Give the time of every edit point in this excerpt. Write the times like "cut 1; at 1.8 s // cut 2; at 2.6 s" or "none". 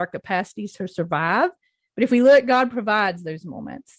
none